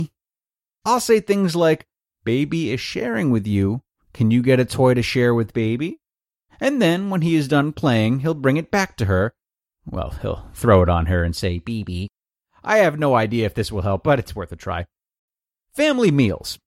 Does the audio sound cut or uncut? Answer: uncut